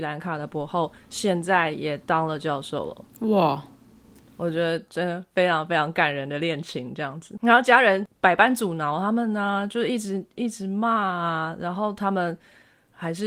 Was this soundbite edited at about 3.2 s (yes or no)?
no